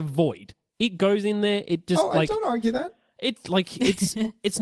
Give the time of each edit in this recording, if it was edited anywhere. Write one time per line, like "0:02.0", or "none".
none